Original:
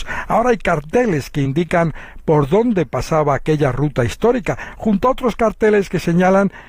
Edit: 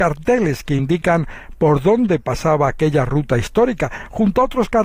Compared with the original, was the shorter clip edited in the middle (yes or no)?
no